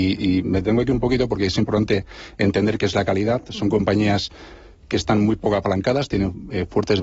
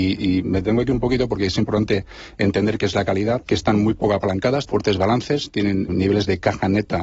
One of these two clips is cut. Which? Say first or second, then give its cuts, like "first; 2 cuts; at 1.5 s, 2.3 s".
second; 3 cuts; at 3.4 s, 4.7 s, 5.9 s